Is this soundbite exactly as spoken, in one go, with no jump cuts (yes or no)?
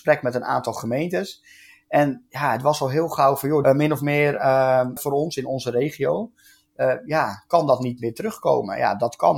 no